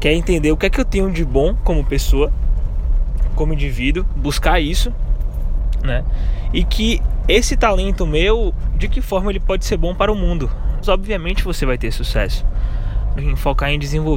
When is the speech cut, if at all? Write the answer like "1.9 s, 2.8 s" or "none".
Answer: 10.8 s, 13.2 s

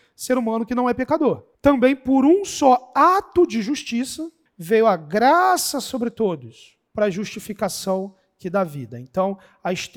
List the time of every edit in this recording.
1.5 s, 4.5 s, 6.9 s

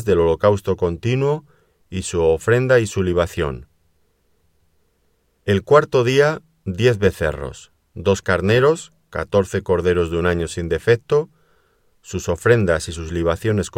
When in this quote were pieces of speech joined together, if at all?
none

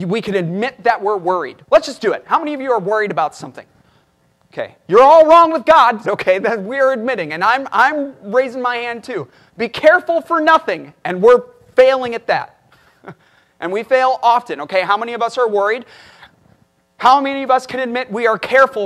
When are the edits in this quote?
6.0 s

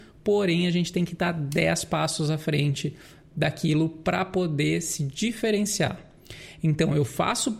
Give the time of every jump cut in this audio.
none

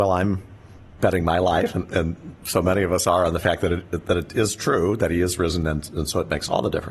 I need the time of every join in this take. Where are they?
none

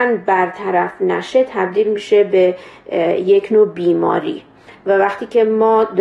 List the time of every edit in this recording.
none

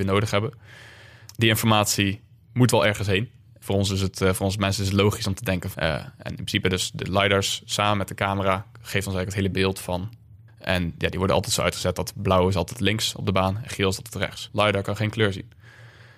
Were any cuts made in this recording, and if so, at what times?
5.7 s, 10.5 s, 14.5 s

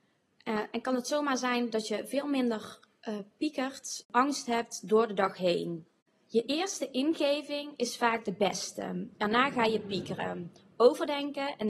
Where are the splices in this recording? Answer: none

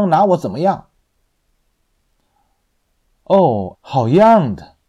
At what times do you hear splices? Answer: 3.7 s

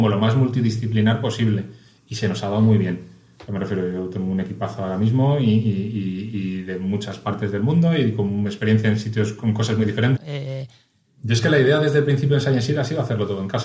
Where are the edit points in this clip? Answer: 10.2 s

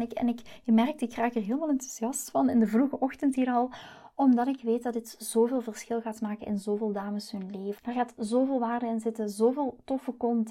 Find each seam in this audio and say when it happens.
7.8 s

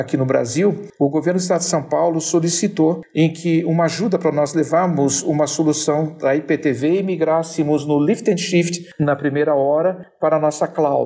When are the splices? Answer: none

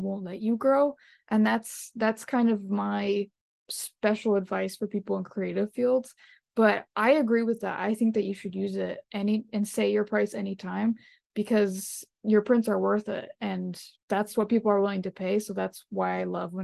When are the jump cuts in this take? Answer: 9.0 s, 14.0 s

